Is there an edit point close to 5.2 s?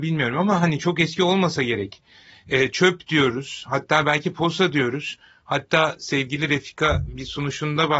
no; 0 cuts

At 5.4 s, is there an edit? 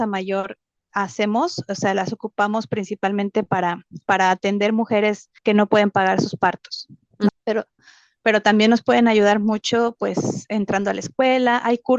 yes; 2 cuts; at 5.4 s, 7.3 s

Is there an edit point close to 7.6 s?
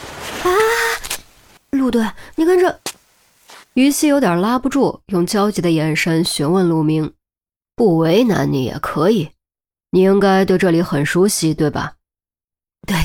yes; 1 cut; at 7.6 s

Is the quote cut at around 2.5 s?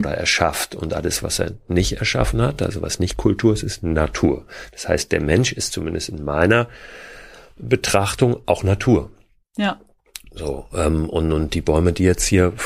no; 0 cuts

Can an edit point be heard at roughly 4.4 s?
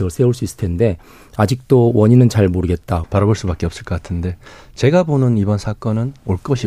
no; 1 cut; at 3.0 s

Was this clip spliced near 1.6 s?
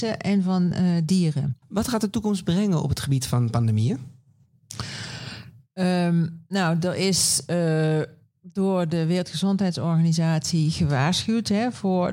yes; 1 cut; at 1.6 s

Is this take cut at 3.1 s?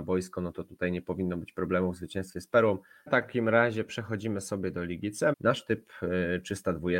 yes; 2 cuts; at 3.1 s, 5.3 s

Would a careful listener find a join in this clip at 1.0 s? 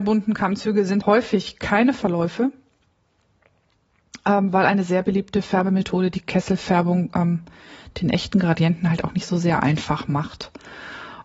yes; 1 cut; at 1.0 s

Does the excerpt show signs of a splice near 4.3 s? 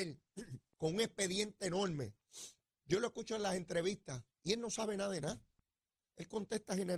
yes; 2 cuts; at 2.8 s, 4.3 s

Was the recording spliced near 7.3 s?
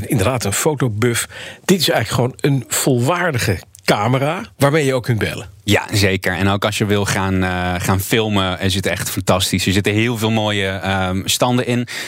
no; 1 cut; at 4.5 s

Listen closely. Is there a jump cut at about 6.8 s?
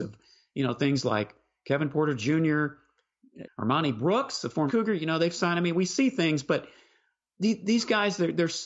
no; 2 cuts; at 3.4 s, 4.7 s

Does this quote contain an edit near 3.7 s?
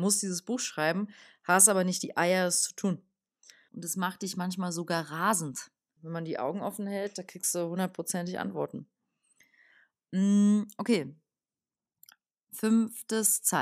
yes; 2 cuts; at 3.7 s, 6.0 s

